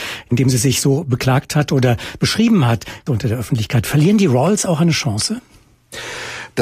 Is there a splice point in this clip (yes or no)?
yes